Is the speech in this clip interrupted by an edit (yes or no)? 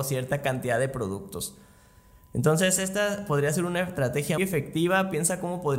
yes